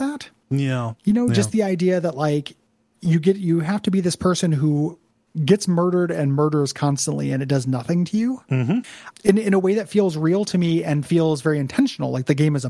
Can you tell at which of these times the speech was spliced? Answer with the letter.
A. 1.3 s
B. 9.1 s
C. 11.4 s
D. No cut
B